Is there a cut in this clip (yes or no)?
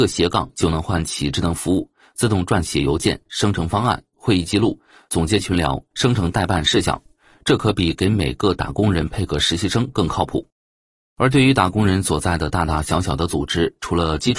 no